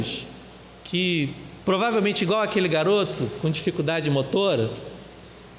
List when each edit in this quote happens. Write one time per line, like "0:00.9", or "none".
none